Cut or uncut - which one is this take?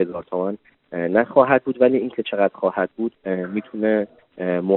cut